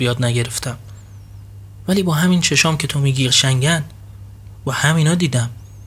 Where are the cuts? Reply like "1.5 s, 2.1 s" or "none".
3.3 s